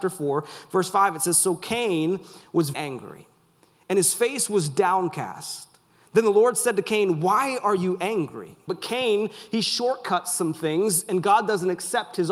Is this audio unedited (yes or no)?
no